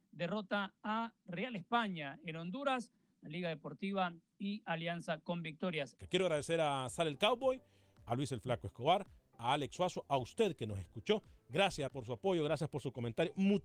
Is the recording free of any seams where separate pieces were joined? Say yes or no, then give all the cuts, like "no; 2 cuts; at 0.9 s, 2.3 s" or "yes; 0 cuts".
no; 2 cuts; at 6.0 s, 11.9 s